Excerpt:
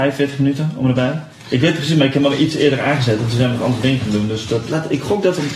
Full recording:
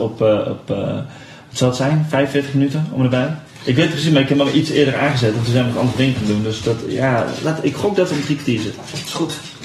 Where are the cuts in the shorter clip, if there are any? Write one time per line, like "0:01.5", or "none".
0:04.7